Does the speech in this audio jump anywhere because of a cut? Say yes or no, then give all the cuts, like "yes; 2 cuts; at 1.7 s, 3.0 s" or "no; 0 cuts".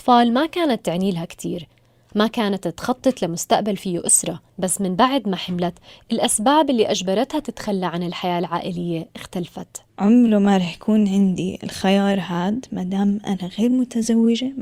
yes; 2 cuts; at 4.5 s, 9.9 s